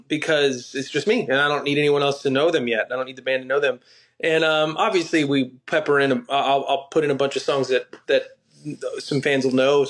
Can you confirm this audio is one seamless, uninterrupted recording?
yes; 0 cuts

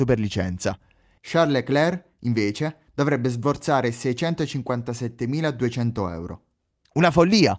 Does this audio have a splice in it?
yes; 1 cut; at 1.2 s

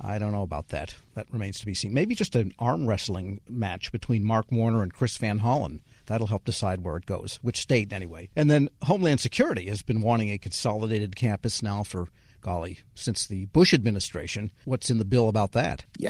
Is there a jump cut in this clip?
no; 0 cuts

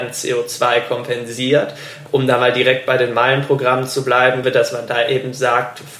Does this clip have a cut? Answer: yes; 2 cuts; at 2.1 s, 4.4 s

